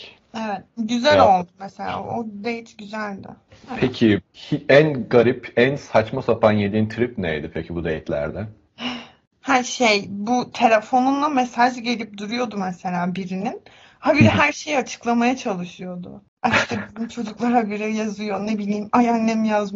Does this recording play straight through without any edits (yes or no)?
yes